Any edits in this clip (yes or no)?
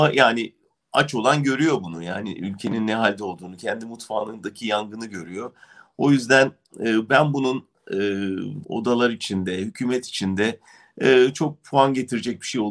yes